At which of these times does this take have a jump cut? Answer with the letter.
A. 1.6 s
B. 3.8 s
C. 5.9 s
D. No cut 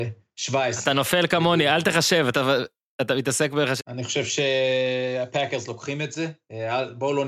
B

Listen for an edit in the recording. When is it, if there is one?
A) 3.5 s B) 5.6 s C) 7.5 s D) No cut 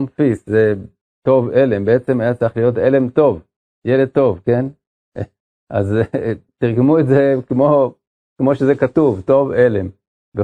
D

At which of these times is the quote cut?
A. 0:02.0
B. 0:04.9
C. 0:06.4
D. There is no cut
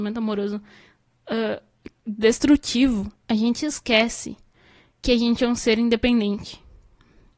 B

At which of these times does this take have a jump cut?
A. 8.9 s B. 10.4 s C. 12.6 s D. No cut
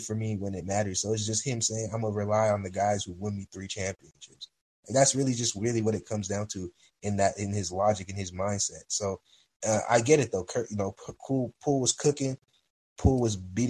D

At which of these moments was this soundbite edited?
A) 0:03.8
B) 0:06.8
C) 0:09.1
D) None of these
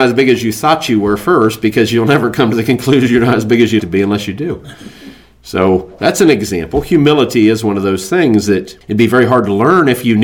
A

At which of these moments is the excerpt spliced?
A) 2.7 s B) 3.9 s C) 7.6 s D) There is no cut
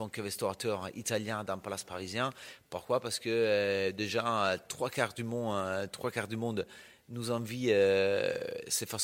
D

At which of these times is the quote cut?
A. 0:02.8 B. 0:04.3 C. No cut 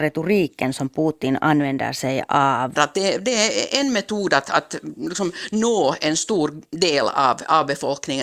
A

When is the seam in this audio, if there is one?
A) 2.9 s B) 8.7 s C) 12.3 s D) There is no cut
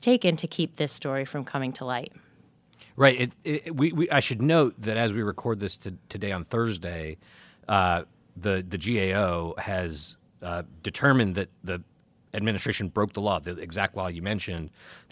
D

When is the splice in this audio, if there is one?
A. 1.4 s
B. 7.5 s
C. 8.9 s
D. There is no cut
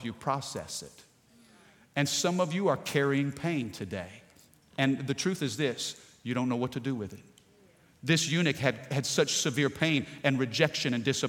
D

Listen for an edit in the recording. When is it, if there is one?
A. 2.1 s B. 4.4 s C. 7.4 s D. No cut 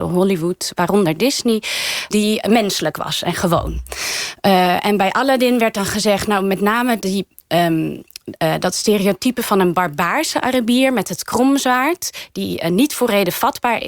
A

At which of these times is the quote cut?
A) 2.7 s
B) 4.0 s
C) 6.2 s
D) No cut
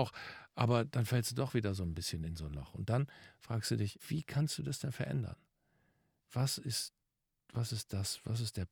B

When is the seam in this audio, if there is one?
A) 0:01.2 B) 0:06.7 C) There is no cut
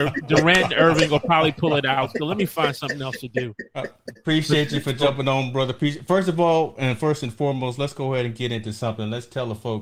C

